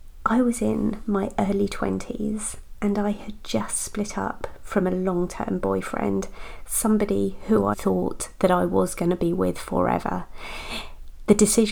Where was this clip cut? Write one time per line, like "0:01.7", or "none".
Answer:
0:07.7